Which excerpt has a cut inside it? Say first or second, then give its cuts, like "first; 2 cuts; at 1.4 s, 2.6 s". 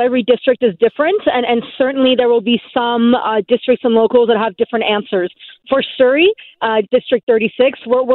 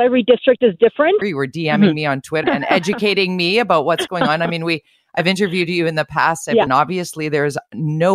second; 3 cuts; at 1.2 s, 2.4 s, 6.7 s